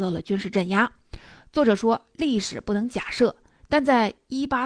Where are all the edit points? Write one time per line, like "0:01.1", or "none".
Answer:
none

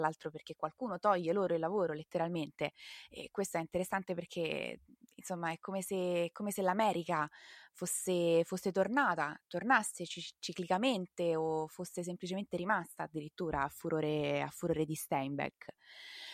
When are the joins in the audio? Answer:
none

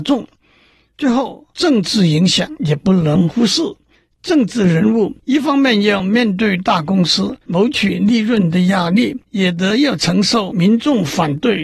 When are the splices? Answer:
0:09.2

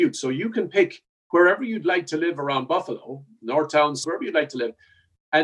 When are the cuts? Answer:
0:04.0

